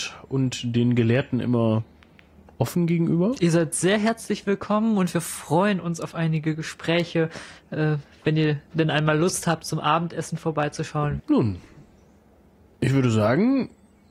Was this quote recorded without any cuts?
no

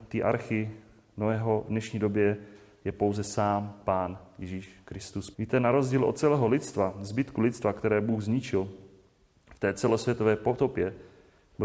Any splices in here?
yes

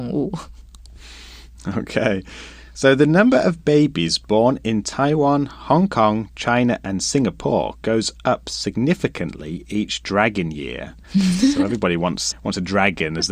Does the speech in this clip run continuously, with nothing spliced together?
no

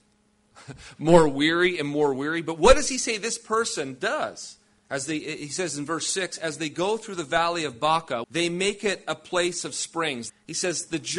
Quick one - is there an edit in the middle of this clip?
yes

